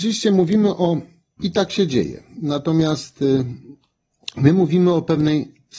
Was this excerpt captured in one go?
no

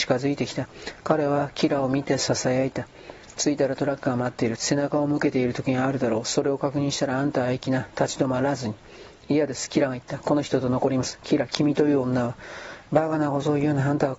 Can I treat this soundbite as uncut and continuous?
no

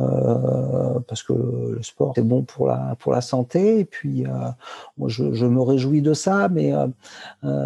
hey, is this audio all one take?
no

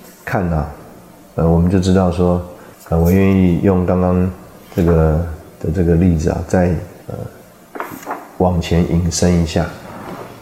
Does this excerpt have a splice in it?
yes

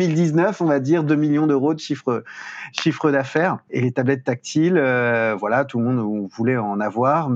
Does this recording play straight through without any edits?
no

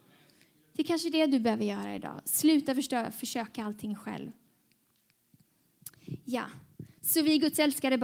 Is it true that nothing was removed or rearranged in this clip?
yes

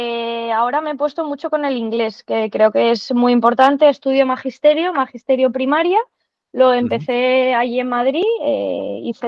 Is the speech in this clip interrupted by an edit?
no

